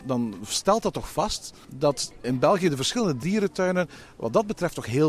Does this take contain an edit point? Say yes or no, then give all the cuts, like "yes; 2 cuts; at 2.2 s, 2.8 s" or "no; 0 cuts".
yes; 1 cut; at 2.2 s